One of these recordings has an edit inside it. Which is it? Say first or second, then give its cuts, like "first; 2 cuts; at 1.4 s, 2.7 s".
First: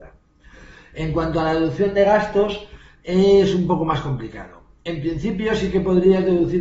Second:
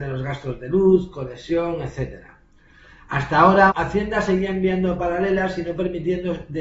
second; 1 cut; at 3.7 s